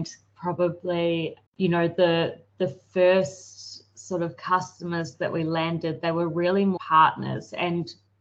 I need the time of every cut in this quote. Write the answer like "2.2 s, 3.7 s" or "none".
1.5 s, 6.8 s